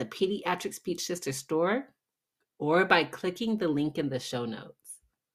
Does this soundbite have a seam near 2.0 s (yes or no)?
no